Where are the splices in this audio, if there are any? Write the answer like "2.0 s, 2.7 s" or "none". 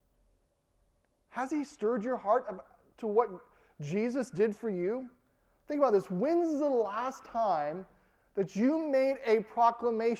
none